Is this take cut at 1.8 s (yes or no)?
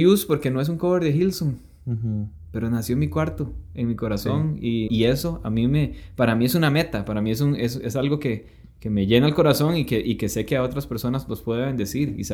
no